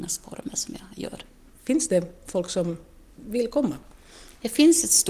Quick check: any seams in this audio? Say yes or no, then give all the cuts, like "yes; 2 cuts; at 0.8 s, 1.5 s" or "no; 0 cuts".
no; 0 cuts